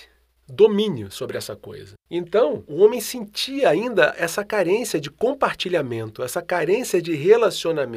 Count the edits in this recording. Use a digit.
1